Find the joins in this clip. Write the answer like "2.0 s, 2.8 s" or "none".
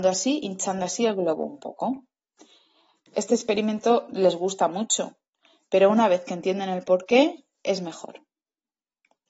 none